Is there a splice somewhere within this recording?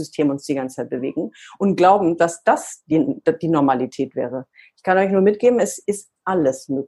no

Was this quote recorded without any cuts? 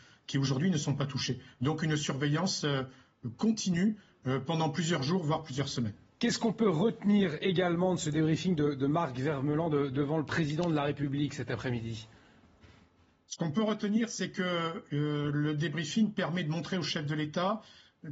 yes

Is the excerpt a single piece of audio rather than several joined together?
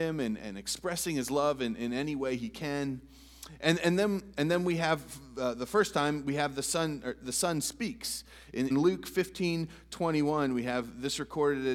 no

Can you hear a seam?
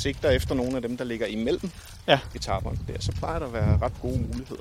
no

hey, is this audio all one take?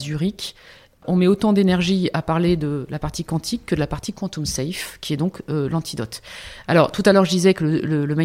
no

